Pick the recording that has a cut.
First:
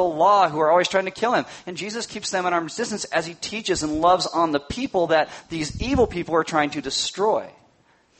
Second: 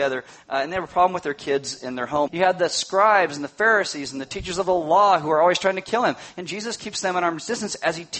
second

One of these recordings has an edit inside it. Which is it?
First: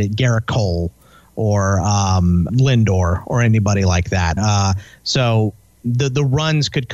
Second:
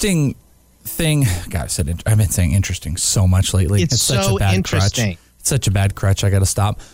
first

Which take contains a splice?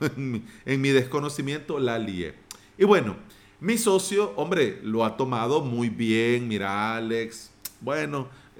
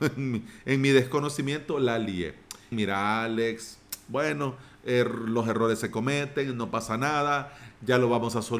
second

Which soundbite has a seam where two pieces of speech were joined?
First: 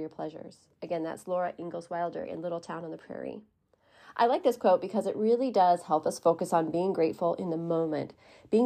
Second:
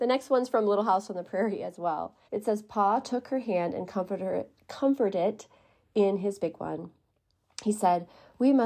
second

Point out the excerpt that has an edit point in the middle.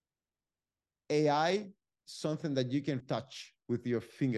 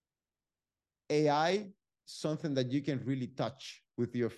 first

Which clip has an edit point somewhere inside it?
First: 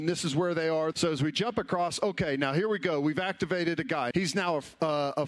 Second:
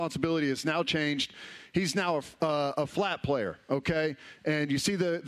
first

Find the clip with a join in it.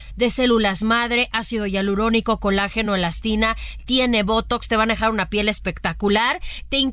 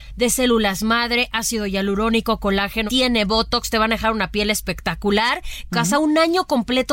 second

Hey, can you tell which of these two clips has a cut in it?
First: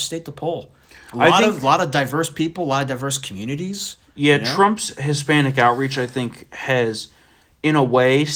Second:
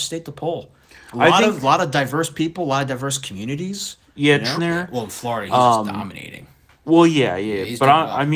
second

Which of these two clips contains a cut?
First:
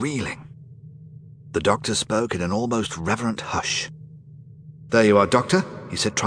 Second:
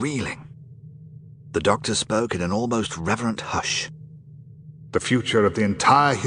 first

